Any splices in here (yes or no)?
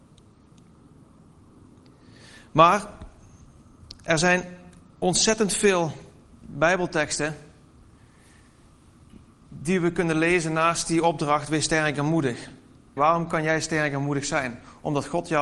yes